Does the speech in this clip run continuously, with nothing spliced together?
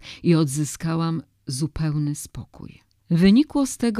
no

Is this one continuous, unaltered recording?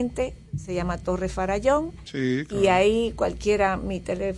yes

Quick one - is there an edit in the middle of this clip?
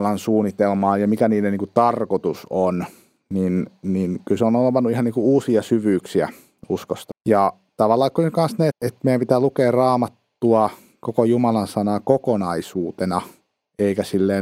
yes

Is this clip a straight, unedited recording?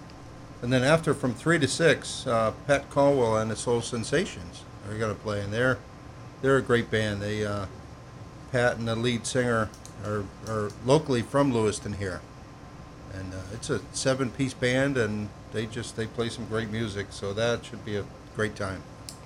yes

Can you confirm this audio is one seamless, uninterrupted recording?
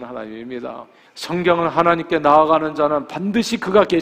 no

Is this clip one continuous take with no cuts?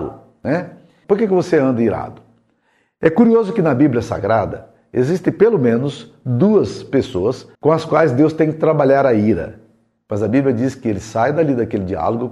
no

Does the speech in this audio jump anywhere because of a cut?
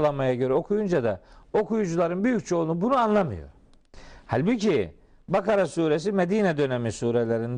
no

